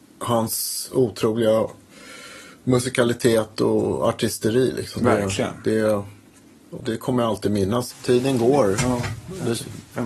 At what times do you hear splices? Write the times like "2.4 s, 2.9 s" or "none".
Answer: 6.8 s, 7.9 s